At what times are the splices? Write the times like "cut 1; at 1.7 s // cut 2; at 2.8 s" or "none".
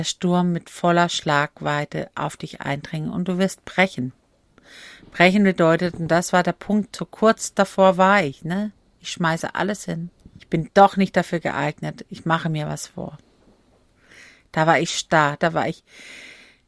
cut 1; at 10.4 s // cut 2; at 15.4 s